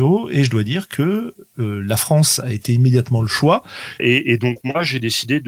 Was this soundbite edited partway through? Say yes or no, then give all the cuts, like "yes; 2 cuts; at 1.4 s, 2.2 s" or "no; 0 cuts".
yes; 1 cut; at 4.0 s